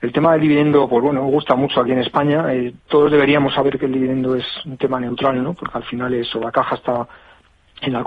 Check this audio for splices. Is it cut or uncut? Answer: cut